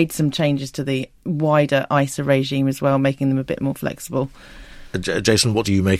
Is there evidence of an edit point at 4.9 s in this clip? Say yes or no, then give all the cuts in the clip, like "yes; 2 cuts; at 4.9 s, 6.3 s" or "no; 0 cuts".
no; 1 cut; at 1.2 s